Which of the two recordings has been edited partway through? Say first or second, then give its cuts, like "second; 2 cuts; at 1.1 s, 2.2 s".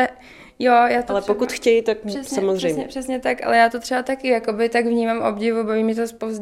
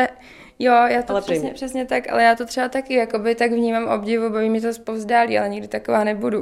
second; 1 cut; at 1.3 s